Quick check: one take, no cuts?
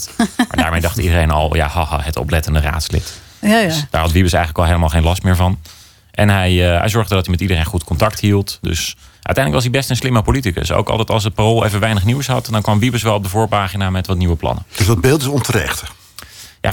yes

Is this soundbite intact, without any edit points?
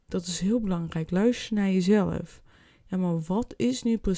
yes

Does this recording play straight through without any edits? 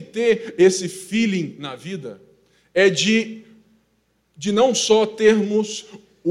yes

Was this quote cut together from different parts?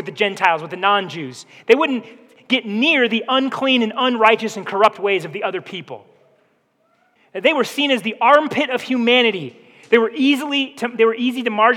yes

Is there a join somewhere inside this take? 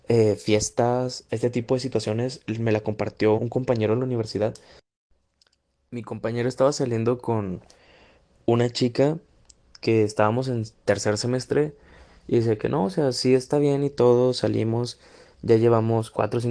yes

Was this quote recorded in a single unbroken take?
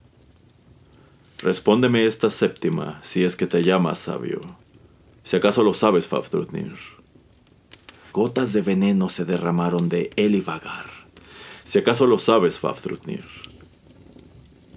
no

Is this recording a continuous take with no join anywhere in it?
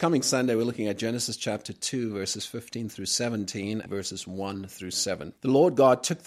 no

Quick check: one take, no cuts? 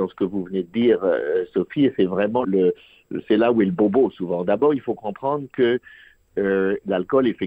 no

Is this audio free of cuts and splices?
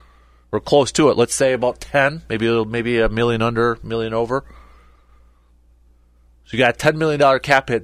yes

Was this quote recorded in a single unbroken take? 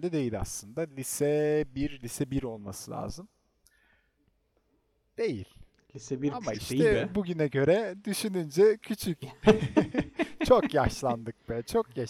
no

